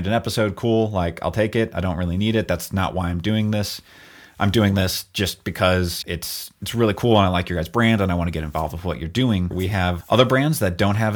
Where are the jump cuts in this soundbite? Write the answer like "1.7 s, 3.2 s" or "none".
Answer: 6.0 s, 9.5 s

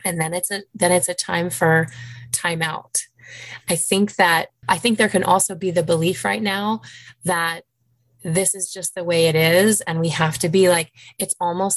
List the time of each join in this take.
none

